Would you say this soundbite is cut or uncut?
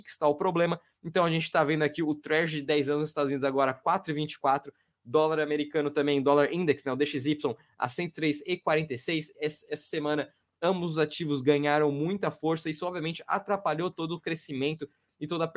uncut